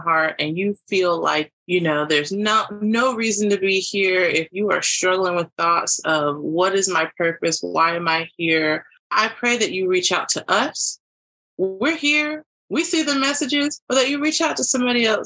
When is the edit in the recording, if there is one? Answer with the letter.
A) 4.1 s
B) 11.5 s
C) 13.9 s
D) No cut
C